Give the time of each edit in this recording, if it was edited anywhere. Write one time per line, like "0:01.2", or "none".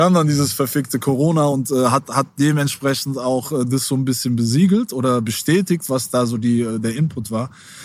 none